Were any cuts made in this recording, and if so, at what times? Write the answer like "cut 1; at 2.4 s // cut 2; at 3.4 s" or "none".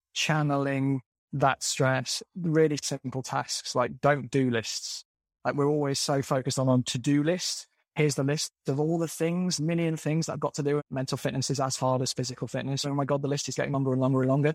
cut 1; at 10.8 s // cut 2; at 12.8 s